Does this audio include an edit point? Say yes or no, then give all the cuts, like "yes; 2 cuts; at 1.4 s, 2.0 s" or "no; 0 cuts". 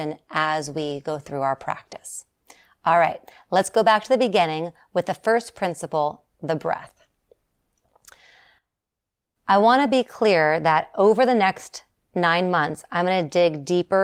no; 0 cuts